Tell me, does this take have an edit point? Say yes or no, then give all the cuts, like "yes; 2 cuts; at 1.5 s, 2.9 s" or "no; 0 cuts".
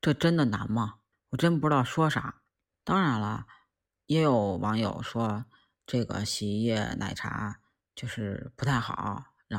yes; 1 cut; at 1.1 s